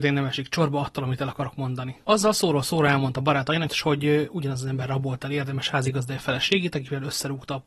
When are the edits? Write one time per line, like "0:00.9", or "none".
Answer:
0:02.0
0:03.7